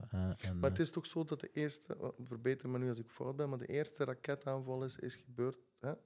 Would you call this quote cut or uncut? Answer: uncut